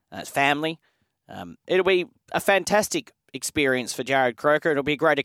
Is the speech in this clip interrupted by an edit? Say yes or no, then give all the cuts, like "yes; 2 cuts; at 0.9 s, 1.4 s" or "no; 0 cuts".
yes; 1 cut; at 1.6 s